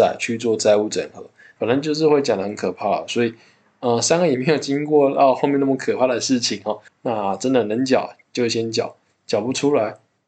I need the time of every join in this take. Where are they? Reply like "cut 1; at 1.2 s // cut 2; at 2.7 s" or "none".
cut 1; at 1.6 s // cut 2; at 6.9 s